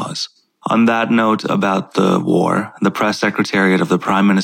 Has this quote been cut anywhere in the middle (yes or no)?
no